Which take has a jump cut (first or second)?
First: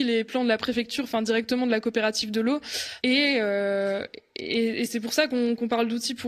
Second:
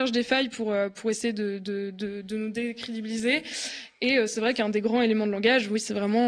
first